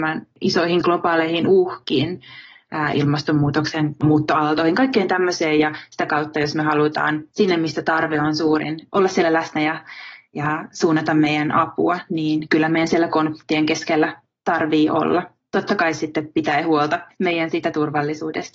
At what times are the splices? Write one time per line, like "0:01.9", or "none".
none